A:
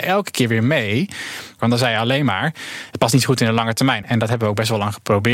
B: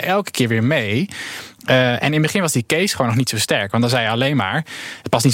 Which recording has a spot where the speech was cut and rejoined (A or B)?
A